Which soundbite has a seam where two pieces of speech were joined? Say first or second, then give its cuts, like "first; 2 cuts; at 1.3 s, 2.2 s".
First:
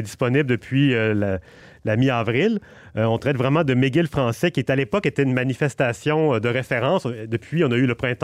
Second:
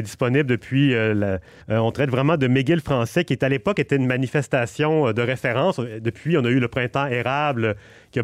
second; 1 cut; at 1.6 s